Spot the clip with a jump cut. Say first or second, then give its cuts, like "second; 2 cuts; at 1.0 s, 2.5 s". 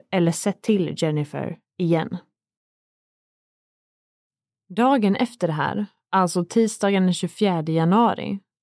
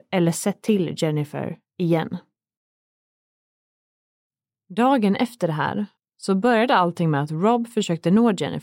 second; 1 cut; at 6.0 s